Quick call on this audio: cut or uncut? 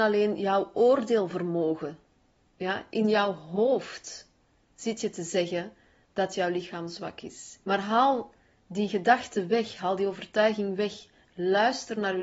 cut